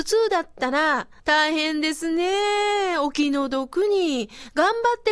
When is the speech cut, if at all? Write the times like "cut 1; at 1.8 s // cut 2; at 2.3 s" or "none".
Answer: cut 1; at 1.2 s